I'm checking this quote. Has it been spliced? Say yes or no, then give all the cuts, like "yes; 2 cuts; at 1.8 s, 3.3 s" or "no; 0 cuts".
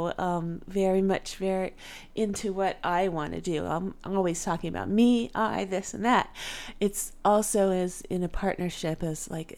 no; 0 cuts